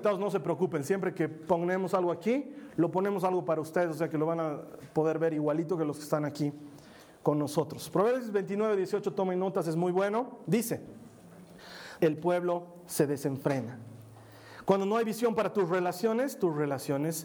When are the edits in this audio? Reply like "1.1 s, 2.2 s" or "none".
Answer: 12.0 s, 14.6 s